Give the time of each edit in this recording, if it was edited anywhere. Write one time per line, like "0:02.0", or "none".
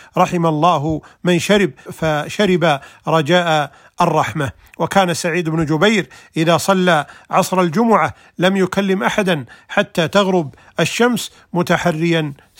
0:01.9